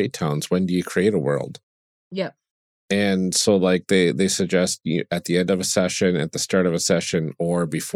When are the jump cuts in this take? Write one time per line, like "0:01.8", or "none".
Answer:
none